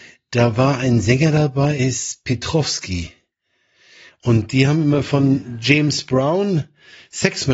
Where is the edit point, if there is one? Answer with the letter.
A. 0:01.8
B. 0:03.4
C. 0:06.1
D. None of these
A